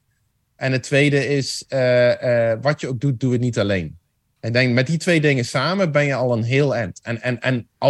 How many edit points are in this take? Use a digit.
0